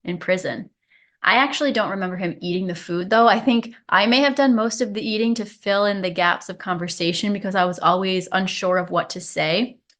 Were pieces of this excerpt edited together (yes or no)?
no